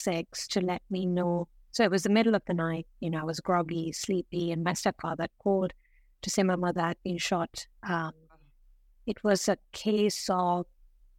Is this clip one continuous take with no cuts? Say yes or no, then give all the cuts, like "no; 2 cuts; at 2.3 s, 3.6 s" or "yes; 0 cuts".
yes; 0 cuts